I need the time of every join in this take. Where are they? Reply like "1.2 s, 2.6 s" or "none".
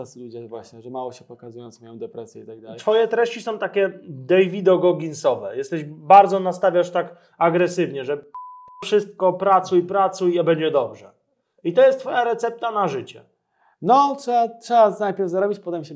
none